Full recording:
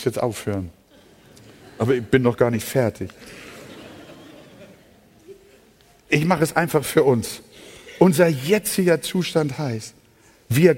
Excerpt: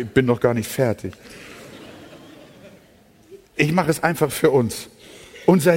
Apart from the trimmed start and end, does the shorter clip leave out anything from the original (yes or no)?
yes